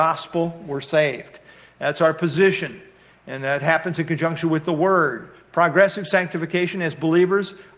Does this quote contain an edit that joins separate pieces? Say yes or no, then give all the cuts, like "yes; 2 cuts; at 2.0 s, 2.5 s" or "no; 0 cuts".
no; 0 cuts